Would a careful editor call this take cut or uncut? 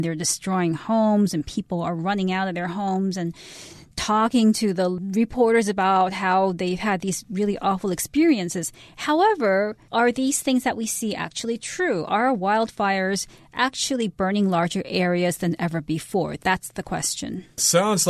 uncut